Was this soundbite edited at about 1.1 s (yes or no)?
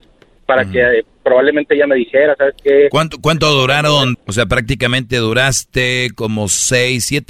no